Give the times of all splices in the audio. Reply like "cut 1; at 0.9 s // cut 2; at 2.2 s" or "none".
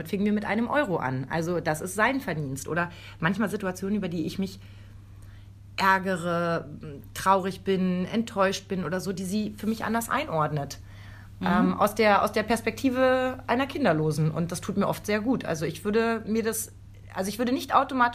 none